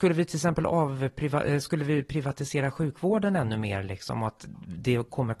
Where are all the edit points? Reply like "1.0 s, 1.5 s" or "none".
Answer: none